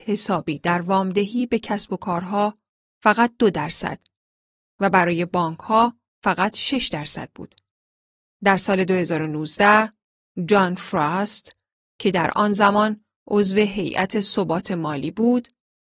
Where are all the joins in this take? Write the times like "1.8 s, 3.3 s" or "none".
none